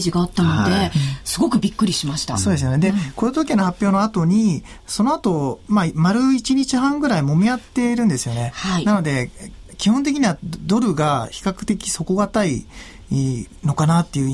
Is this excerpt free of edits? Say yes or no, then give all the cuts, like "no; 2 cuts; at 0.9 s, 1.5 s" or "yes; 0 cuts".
yes; 0 cuts